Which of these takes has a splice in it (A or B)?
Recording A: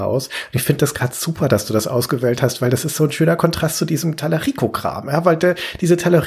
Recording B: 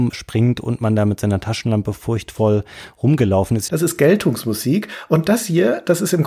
B